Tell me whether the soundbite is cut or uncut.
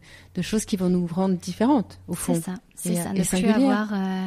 uncut